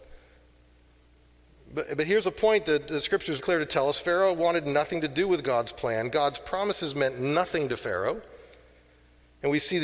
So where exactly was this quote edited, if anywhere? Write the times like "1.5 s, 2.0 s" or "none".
3.4 s